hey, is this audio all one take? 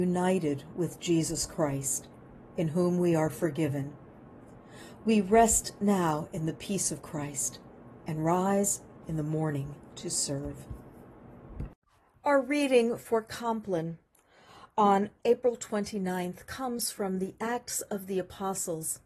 yes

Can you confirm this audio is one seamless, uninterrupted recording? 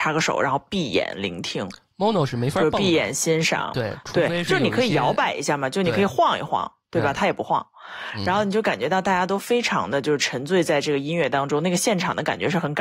yes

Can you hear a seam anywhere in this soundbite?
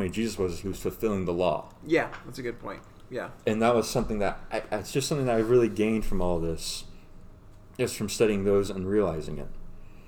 no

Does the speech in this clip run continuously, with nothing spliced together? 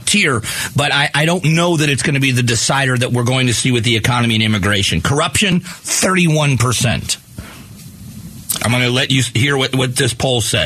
no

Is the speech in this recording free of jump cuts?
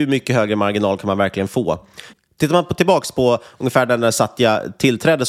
yes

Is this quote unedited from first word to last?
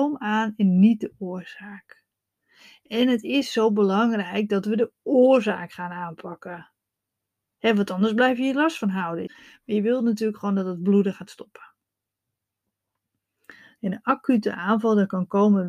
no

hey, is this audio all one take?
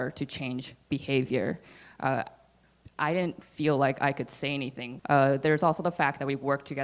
no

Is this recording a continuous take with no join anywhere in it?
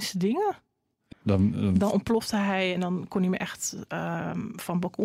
no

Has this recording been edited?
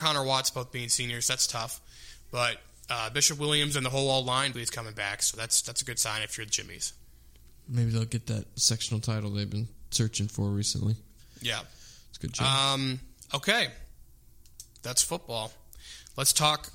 yes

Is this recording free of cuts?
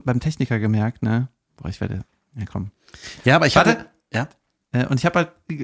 yes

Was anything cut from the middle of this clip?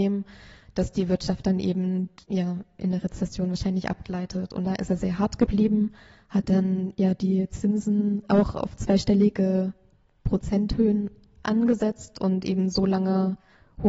yes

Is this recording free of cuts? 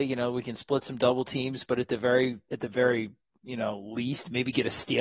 yes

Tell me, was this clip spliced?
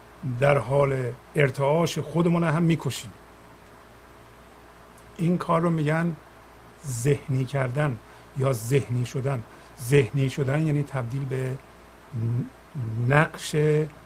yes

